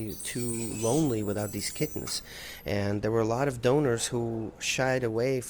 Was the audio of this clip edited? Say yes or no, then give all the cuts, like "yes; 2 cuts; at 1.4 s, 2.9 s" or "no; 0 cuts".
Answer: no; 0 cuts